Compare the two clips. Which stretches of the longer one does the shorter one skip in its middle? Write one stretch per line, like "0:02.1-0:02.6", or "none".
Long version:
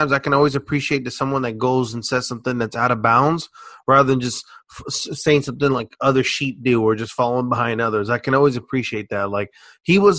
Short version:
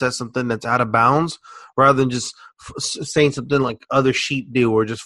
none